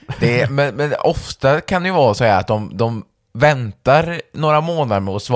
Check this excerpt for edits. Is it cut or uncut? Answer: uncut